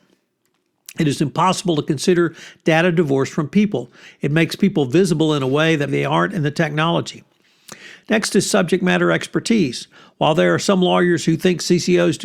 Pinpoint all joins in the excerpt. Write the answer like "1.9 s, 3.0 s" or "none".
4.1 s, 5.9 s